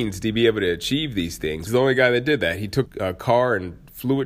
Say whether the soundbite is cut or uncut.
cut